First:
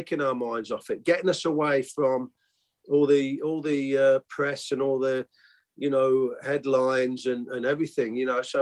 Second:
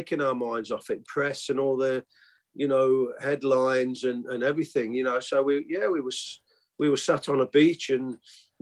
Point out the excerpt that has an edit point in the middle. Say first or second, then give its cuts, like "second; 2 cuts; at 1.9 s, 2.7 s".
second; 1 cut; at 1.0 s